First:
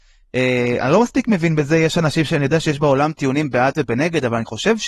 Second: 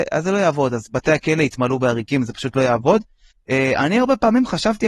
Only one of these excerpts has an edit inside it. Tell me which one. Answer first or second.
second